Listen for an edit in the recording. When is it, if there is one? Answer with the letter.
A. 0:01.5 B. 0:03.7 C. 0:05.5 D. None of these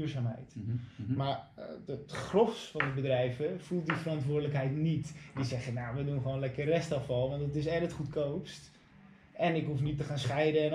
D